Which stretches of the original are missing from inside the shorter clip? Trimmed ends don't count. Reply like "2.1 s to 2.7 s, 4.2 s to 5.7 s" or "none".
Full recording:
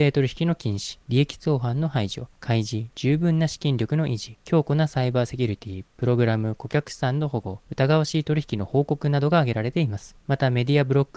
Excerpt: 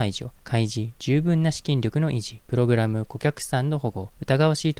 4.4 s to 5.9 s